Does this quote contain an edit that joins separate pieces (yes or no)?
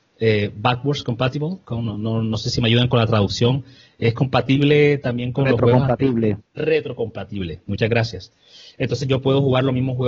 no